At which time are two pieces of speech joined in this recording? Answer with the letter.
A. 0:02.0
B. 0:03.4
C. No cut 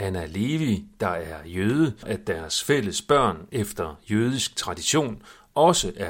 A